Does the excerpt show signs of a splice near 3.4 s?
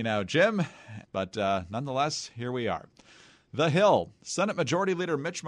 no; 1 cut; at 1.0 s

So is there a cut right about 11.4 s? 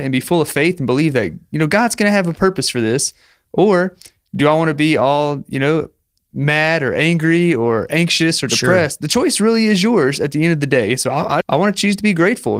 yes; 1 cut; at 11.4 s

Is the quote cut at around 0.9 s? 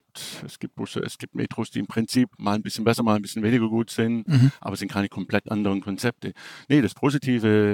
no; 1 cut; at 4.3 s

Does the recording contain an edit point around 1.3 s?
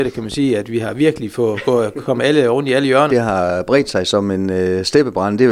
no; 1 cut; at 3.1 s

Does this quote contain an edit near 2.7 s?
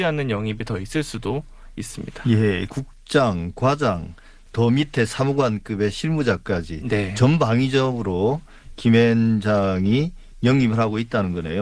yes; 1 cut; at 2.7 s

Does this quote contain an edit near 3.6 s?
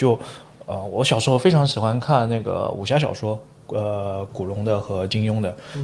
no; 0 cuts

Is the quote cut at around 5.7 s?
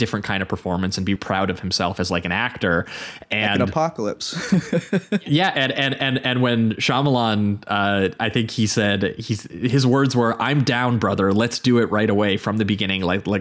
no; 1 cut; at 1.2 s

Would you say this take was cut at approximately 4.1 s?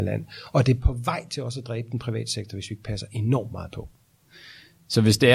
no; 0 cuts

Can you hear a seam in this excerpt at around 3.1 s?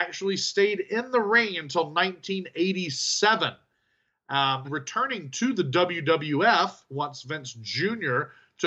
no; 1 cut; at 4.6 s

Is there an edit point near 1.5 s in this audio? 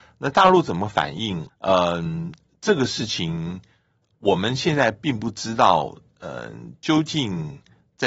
yes; 1 cut; at 1.5 s

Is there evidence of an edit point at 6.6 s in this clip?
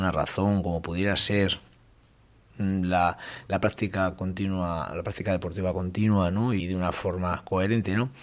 yes; 1 cut; at 6.6 s

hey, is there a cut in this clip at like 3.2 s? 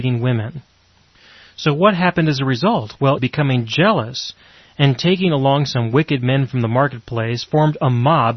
yes; 1 cut; at 3.2 s

